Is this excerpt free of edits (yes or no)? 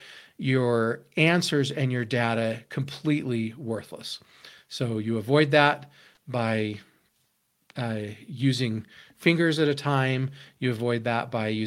yes